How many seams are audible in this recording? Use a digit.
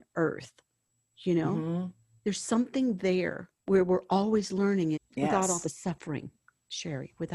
2